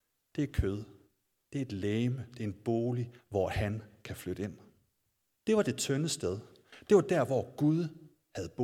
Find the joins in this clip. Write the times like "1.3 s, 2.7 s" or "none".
3.2 s, 5.3 s